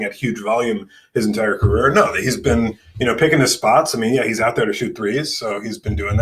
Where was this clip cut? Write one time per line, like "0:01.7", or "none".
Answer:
none